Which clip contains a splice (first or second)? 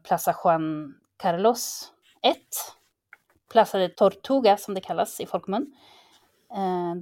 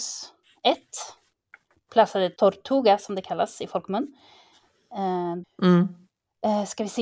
second